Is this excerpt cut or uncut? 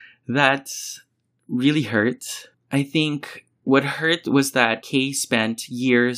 cut